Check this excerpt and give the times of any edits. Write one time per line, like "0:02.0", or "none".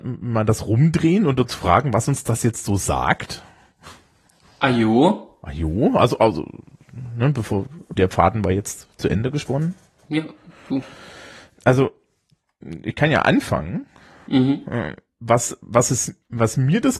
0:08.0